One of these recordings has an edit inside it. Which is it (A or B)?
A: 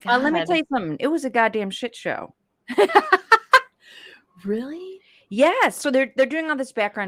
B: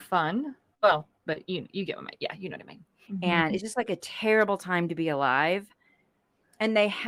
B